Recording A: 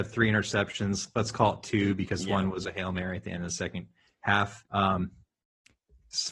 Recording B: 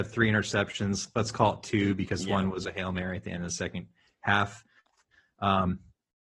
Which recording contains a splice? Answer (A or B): A